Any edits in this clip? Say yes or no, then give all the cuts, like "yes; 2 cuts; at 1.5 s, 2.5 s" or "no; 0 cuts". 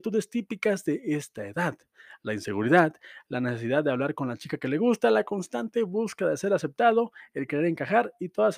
no; 0 cuts